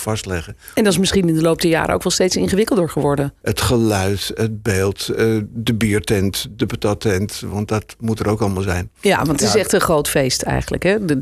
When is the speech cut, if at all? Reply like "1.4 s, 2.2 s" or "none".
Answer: 3.4 s